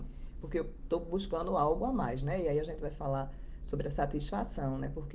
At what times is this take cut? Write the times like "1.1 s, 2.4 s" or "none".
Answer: none